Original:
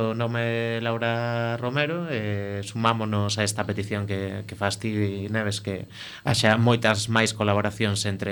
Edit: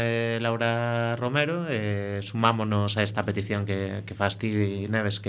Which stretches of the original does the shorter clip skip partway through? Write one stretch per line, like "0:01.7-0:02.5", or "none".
none